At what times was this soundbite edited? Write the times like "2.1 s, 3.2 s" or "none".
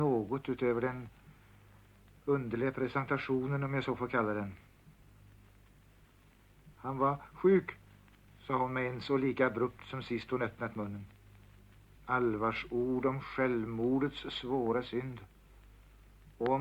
6.7 s, 12.0 s